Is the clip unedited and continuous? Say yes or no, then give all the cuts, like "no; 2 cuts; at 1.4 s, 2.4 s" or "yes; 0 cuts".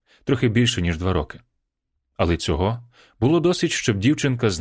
yes; 0 cuts